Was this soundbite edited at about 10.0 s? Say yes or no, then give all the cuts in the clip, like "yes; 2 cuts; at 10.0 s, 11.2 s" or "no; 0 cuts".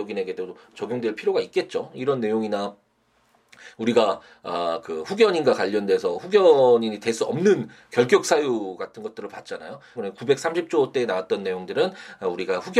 yes; 1 cut; at 10.0 s